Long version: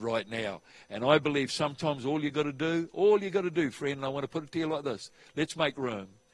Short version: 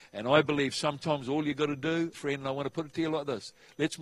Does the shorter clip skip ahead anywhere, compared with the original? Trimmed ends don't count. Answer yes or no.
yes